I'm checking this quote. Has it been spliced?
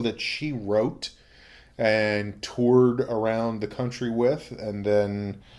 no; 0 cuts

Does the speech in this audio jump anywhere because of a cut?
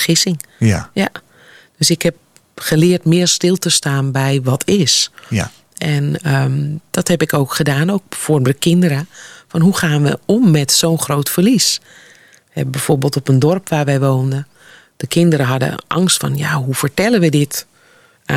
no; 0 cuts

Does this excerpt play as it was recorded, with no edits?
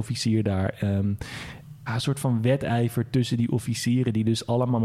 no; 1 cut; at 1.9 s

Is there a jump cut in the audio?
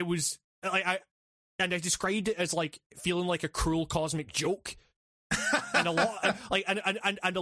no; 0 cuts

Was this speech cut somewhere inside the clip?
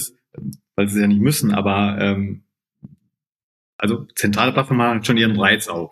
no; 0 cuts

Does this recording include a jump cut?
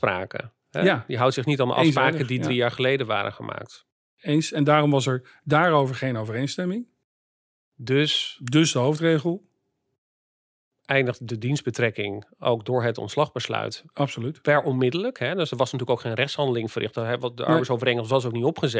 no; 0 cuts

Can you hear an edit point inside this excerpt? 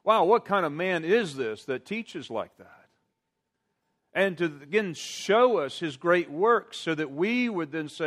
no; 0 cuts

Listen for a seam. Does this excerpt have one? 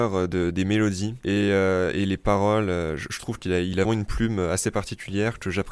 yes; 1 cut; at 3.9 s

